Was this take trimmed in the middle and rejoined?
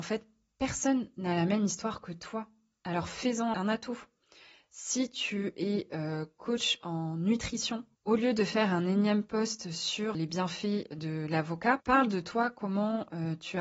yes; 2 cuts; at 7.9 s, 11.8 s

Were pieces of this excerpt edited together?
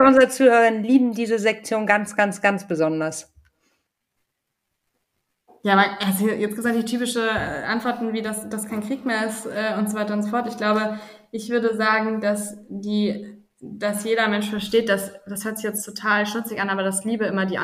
no; 0 cuts

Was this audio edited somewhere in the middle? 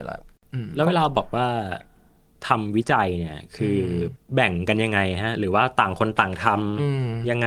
no; 0 cuts

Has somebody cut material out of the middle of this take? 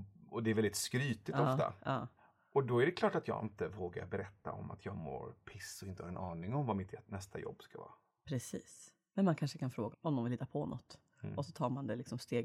yes; 1 cut; at 9.9 s

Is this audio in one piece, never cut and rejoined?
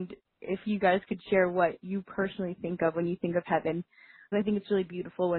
no; 1 cut; at 4.3 s

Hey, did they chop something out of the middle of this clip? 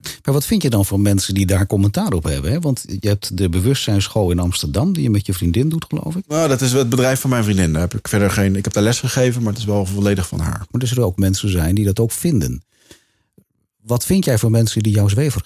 yes; 1 cut; at 10.7 s

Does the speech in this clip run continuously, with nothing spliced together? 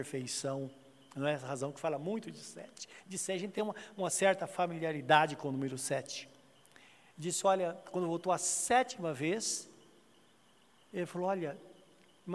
yes; 0 cuts

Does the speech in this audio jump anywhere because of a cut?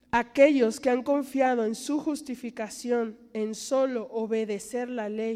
no; 0 cuts

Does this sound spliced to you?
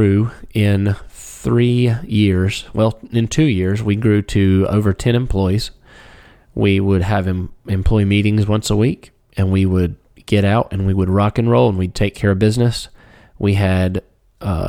no; 0 cuts

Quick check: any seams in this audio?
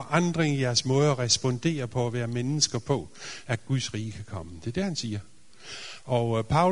yes; 1 cut; at 3.4 s

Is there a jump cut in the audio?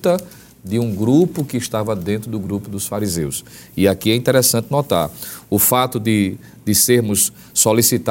no; 0 cuts

